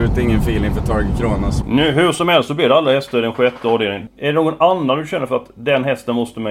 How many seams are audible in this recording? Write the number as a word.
two